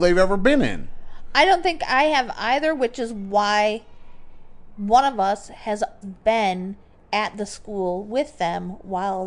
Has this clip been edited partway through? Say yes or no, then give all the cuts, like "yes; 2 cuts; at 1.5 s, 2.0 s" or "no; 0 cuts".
yes; 1 cut; at 6.0 s